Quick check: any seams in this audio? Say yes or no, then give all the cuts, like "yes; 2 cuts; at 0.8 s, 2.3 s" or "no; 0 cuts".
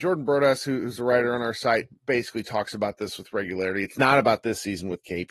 no; 0 cuts